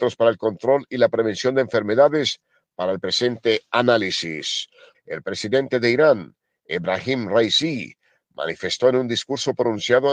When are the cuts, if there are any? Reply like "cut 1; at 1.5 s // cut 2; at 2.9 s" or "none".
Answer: cut 1; at 4.9 s